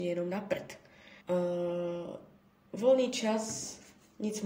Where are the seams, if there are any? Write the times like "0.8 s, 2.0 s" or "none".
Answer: 1.2 s